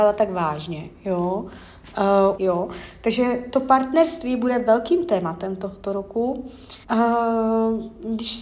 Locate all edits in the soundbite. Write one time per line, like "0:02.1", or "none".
0:02.4
0:06.8